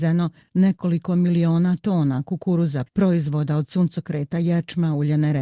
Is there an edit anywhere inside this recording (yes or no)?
yes